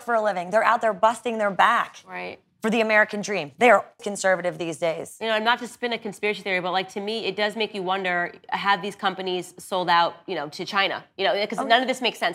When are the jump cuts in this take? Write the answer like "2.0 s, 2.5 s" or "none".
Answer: 4.0 s